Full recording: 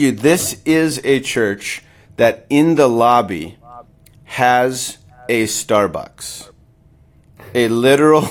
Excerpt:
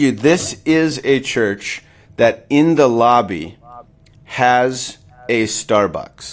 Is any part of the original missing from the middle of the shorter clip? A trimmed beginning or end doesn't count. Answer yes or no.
no